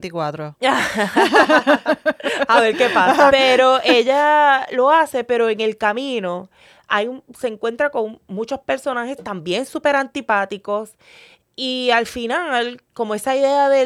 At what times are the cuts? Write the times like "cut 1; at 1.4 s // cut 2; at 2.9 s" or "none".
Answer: cut 1; at 3.3 s // cut 2; at 12.9 s